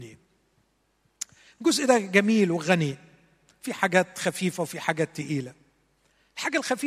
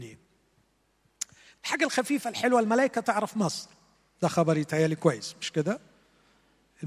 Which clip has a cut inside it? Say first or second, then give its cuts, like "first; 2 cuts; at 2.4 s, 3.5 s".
second; 1 cut; at 1.5 s